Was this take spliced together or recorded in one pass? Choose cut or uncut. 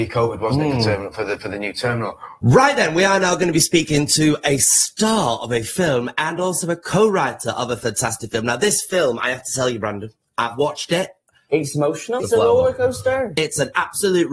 cut